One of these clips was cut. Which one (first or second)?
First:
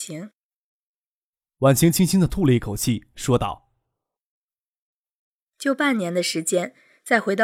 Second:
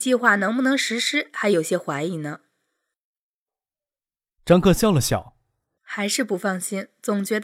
second